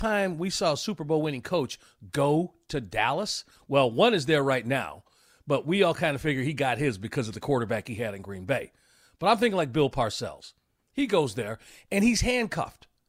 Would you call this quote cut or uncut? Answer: uncut